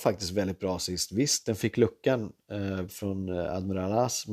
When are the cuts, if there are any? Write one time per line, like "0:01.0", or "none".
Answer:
0:02.9